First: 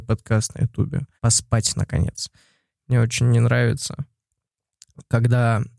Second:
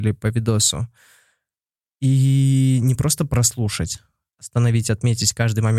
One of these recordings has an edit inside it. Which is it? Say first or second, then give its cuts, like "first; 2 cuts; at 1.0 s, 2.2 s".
first; 2 cuts; at 1.2 s, 2.7 s